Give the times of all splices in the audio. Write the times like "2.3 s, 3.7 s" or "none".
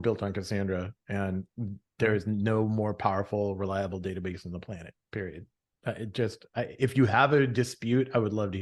none